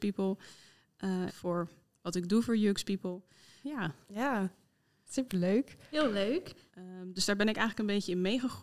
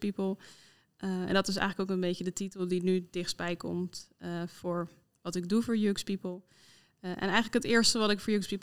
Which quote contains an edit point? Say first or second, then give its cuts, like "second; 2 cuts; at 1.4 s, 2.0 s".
first; 3 cuts; at 1.3 s, 3.6 s, 6.7 s